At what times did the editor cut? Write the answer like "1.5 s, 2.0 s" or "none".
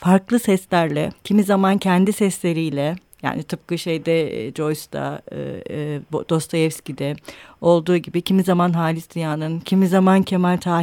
9.6 s